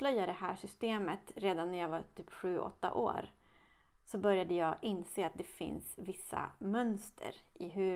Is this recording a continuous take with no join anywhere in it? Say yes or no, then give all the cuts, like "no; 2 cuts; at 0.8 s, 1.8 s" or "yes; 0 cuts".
yes; 0 cuts